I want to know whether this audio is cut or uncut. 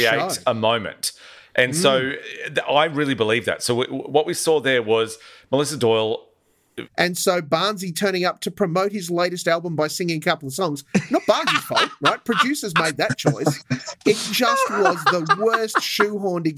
cut